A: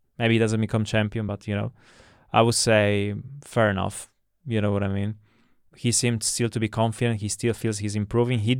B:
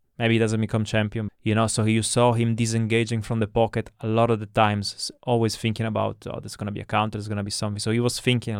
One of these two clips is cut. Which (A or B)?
B